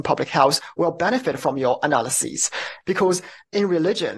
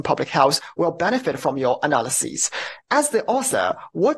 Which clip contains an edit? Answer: first; 1 cut; at 2.8 s

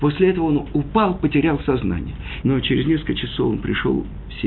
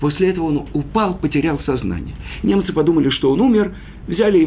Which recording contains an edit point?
first; 1 cut; at 2.4 s

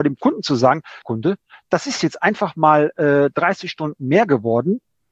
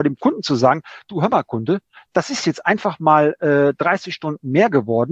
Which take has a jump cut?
first; 1 cut; at 1.0 s

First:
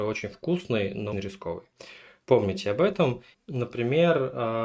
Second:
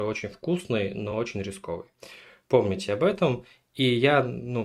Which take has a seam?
first; 2 cuts; at 1.1 s, 3.3 s

